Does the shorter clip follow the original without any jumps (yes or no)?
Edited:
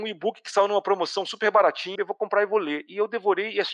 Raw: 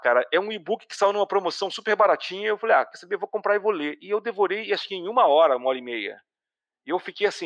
no